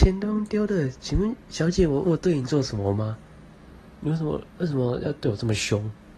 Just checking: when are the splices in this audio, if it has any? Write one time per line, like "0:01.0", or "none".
0:02.0

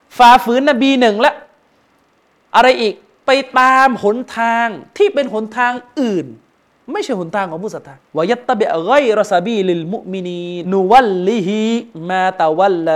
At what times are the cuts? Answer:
0:08.0
0:10.6

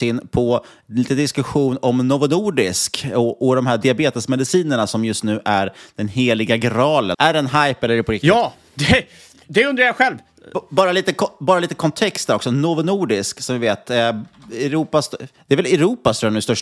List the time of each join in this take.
0:07.1

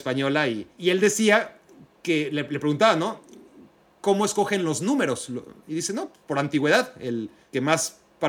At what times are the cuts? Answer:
none

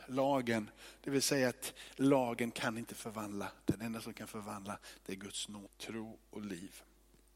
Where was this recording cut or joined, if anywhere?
none

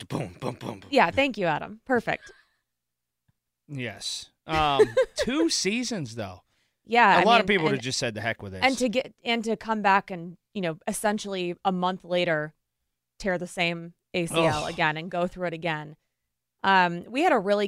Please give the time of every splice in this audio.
none

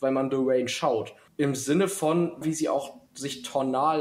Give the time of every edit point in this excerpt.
0:01.3
0:02.4

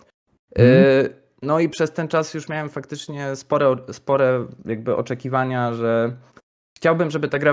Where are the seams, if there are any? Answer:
none

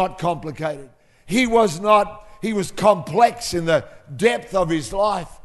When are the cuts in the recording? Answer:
none

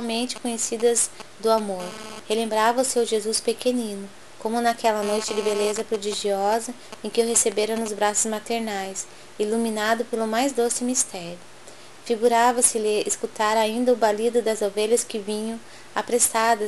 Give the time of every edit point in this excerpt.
0:02.2

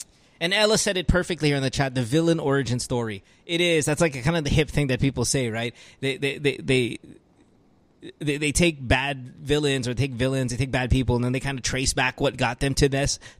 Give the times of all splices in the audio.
none

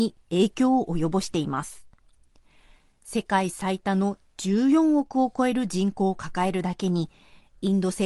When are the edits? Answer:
none

